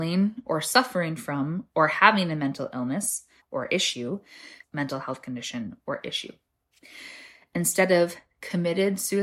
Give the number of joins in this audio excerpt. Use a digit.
2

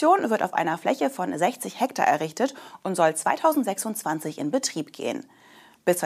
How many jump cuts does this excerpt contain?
0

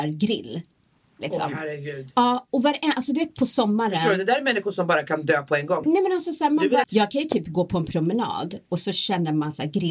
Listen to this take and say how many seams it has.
2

